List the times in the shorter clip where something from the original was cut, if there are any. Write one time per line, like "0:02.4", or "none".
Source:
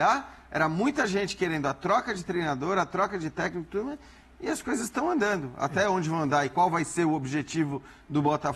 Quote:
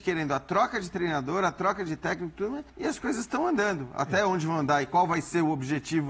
0:02.7

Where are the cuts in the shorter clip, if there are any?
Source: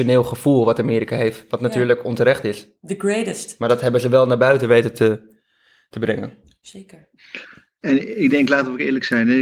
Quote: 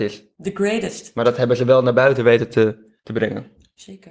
0:03.0

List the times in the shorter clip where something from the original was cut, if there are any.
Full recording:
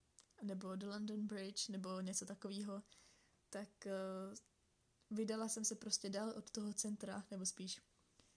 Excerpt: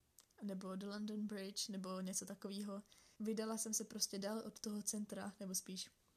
0:03.2

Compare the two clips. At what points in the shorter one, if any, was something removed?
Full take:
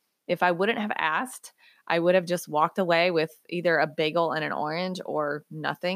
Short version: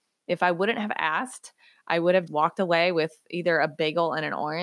0:02.3

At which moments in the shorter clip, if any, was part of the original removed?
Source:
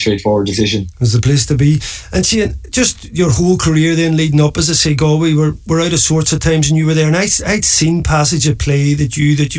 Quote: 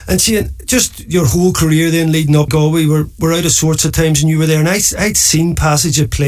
0:02.5

